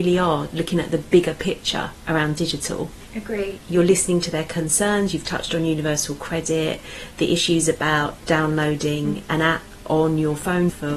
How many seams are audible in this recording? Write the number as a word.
one